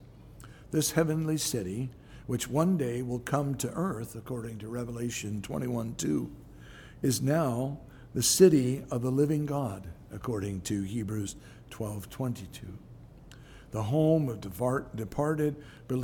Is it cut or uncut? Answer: uncut